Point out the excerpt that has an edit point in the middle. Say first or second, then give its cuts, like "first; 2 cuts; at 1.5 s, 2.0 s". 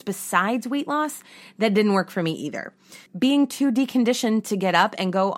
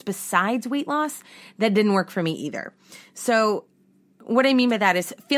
first; 1 cut; at 3.1 s